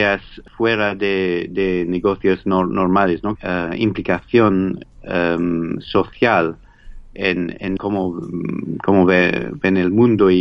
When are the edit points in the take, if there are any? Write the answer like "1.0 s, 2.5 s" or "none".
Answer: 3.4 s, 7.8 s